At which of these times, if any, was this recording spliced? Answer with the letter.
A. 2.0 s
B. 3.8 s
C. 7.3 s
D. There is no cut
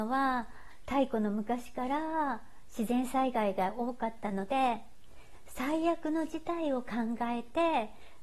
D